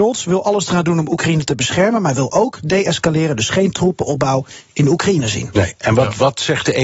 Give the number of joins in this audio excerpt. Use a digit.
0